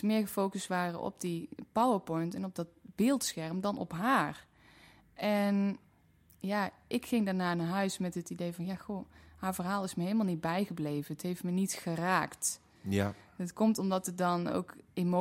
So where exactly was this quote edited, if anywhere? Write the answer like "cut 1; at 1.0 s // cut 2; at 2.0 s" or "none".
none